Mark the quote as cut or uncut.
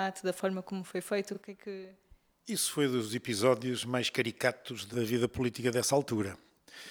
uncut